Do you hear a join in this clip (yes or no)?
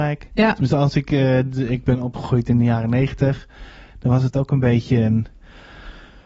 no